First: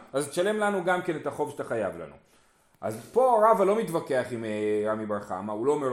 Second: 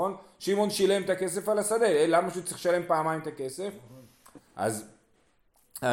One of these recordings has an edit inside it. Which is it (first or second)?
second